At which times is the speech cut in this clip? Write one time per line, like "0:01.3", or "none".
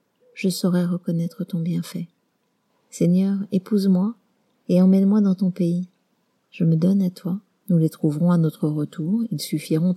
0:02.7
0:07.6